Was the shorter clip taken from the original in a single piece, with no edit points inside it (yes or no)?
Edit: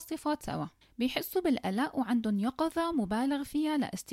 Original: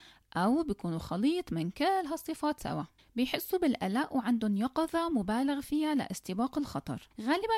yes